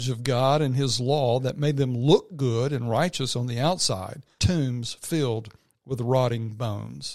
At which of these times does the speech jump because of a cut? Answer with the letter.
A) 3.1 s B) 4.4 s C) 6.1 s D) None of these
B